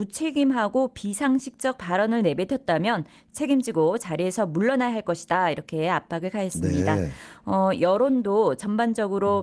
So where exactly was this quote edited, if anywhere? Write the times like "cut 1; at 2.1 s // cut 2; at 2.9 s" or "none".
none